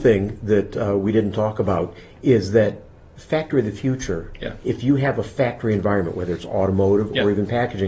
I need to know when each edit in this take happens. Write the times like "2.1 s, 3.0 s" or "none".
4.6 s